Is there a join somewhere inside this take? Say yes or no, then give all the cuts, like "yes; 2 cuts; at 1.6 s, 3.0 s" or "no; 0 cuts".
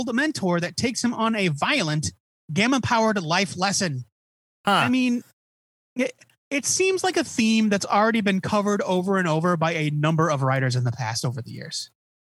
yes; 1 cut; at 4.6 s